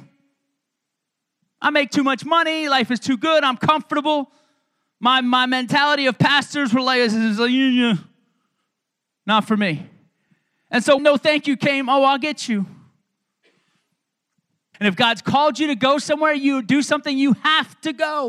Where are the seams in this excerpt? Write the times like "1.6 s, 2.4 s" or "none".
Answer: 11.0 s, 14.7 s

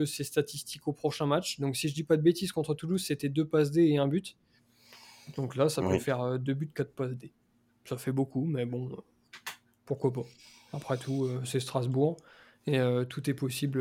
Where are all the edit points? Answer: none

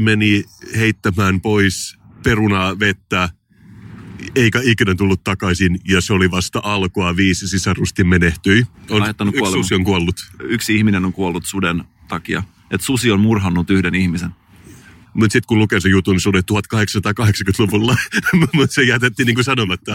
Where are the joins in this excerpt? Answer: 8.7 s, 15.0 s

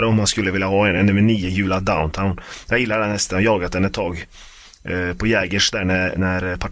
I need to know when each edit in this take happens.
none

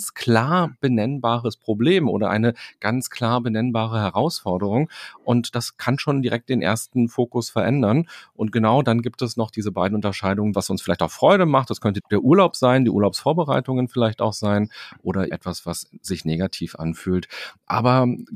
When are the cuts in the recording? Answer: 10.5 s, 12.0 s, 15.3 s

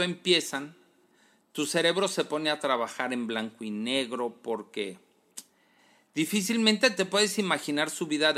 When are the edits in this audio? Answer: none

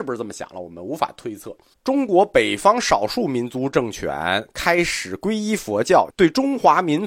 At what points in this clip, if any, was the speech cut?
1.7 s, 6.1 s

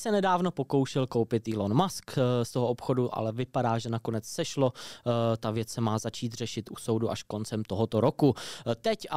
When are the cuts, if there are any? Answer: none

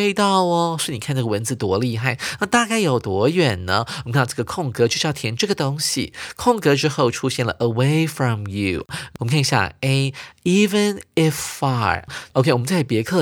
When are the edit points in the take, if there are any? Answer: 9.2 s

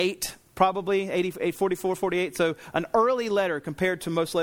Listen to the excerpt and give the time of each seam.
none

